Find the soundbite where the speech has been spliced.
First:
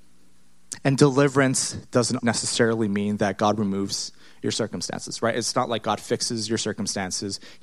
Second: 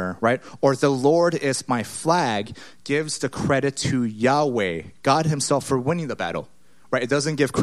first; 1 cut; at 2.2 s

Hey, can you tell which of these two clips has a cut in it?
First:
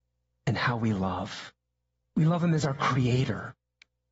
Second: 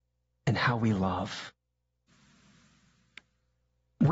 first; 1 cut; at 2.0 s

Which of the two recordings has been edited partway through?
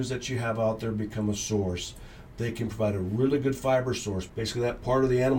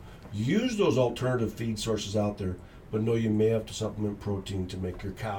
first; 2 cuts; at 2.3 s, 4.3 s

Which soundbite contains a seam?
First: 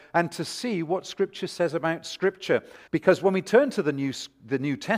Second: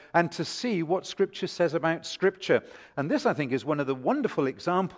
first; 1 cut; at 2.9 s

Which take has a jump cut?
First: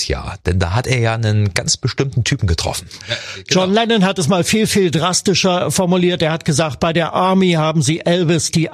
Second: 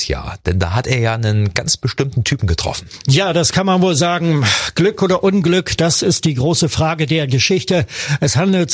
first; 1 cut; at 3.0 s

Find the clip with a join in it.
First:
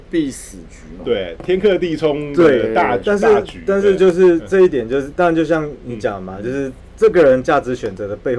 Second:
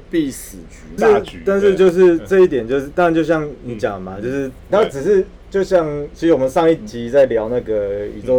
second; 2 cuts; at 1.0 s, 4.7 s

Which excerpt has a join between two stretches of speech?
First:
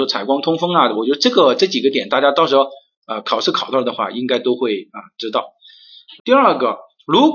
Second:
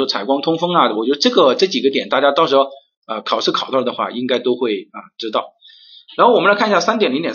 first; 1 cut; at 6.2 s

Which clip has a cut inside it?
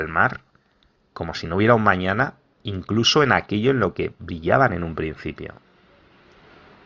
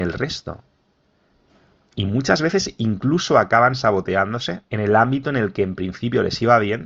second; 1 cut; at 4.7 s

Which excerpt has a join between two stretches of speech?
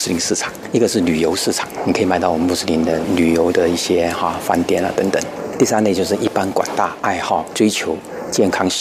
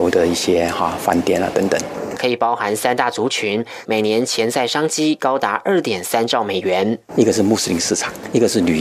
second; 2 cuts; at 2.2 s, 3.9 s

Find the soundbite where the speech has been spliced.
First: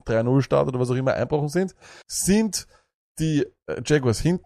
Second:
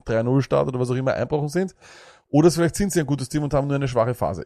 first; 1 cut; at 2.0 s

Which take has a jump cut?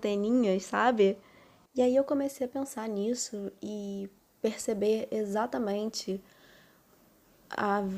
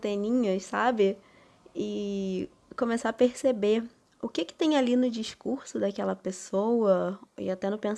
first; 1 cut; at 1.7 s

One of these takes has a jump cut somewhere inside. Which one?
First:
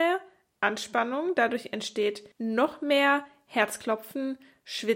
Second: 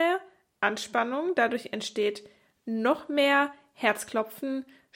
first; 1 cut; at 2.3 s

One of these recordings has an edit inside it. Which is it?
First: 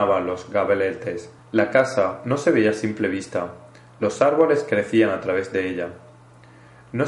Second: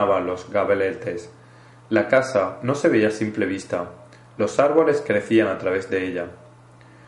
first; 1 cut; at 1.4 s

